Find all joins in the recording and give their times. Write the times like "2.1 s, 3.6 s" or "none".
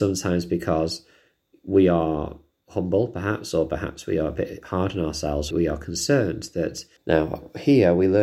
5.5 s, 7.0 s